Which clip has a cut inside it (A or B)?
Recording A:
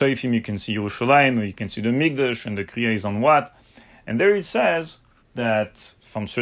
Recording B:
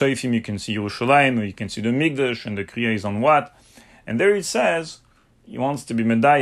A